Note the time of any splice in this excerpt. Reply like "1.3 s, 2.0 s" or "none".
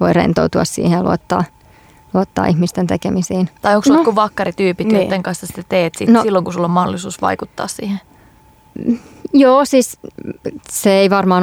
3.6 s